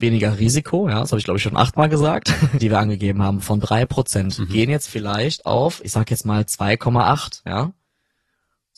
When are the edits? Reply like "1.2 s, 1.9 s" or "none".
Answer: 2.6 s